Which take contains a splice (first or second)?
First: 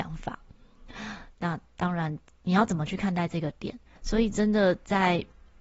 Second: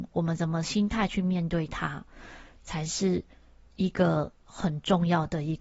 first